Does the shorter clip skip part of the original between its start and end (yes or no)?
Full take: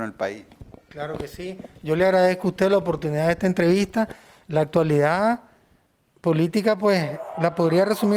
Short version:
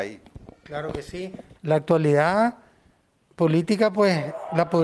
yes